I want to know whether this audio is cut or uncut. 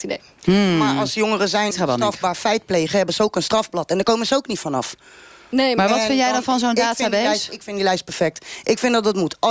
cut